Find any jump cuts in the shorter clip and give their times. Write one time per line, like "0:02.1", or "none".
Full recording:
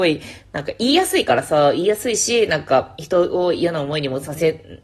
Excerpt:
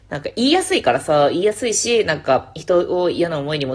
none